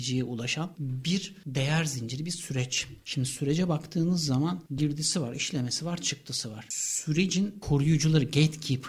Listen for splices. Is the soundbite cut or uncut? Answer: uncut